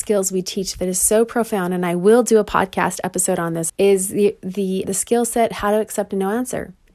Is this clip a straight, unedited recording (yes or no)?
no